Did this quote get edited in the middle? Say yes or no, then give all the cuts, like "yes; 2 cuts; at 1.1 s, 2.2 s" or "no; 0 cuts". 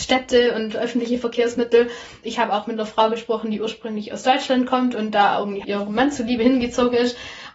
yes; 2 cuts; at 2.2 s, 5.6 s